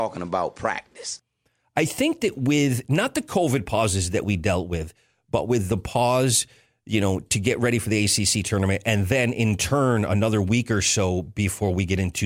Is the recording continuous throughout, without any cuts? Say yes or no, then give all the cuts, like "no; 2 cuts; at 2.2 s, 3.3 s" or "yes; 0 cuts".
yes; 0 cuts